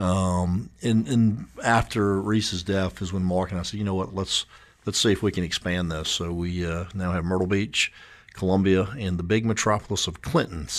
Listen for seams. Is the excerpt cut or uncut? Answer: uncut